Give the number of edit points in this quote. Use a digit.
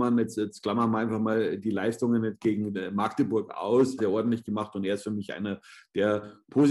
1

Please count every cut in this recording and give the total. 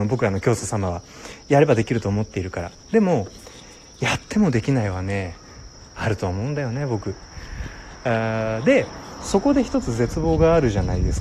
0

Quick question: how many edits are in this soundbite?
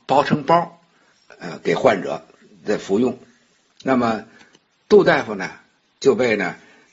1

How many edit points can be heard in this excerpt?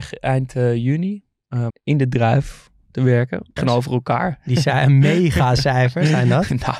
2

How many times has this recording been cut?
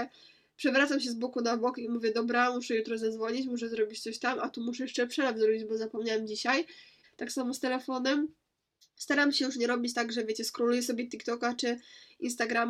1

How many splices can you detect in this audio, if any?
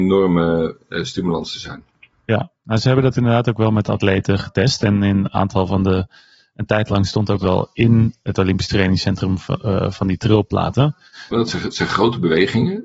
1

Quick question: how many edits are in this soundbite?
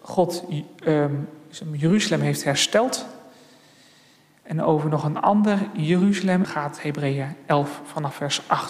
1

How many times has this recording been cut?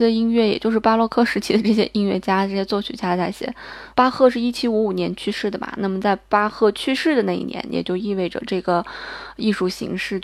1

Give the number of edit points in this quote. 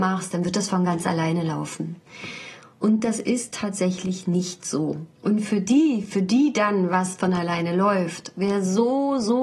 1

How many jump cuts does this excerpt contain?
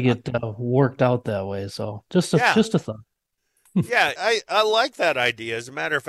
1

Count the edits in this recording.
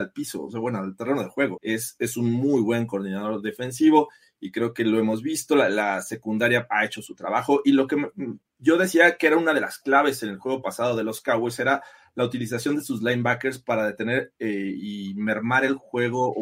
1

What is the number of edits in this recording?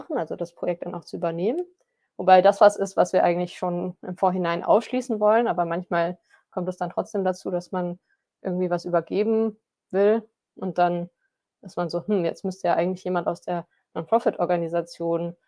0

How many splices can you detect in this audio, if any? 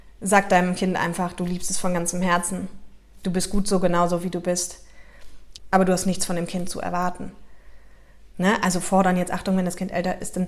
2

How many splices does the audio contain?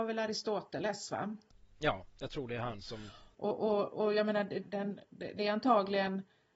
1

